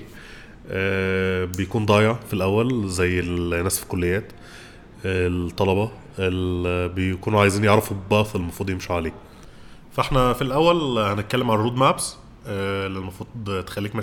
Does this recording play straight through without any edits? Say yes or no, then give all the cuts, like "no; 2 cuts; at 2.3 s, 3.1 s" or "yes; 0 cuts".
yes; 0 cuts